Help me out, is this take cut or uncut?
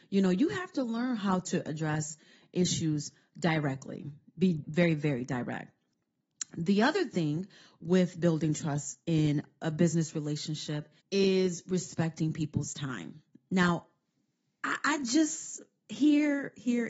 cut